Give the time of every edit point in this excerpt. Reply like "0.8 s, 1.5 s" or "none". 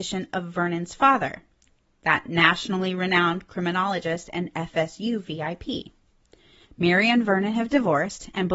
6.6 s